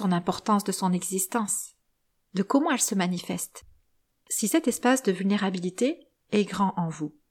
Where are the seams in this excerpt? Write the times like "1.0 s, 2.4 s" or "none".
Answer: none